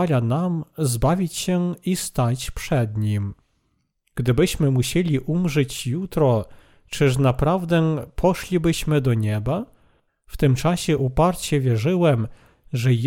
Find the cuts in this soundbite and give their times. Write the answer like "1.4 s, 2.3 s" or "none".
10.1 s